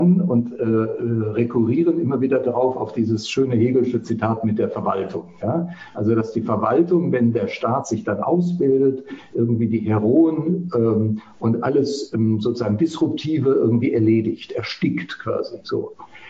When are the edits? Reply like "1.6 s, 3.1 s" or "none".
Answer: none